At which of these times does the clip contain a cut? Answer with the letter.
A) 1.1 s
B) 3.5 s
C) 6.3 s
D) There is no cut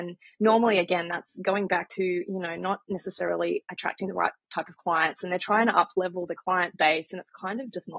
D